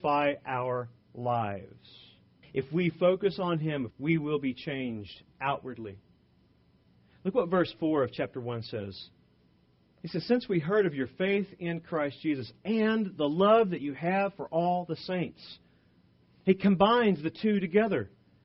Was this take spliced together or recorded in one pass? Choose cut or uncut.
cut